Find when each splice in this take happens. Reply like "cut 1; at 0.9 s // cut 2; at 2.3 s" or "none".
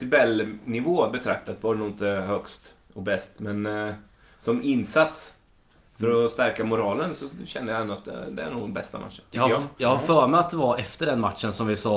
none